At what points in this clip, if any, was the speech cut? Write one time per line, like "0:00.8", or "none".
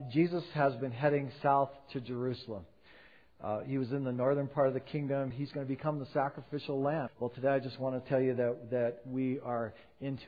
0:05.3
0:07.1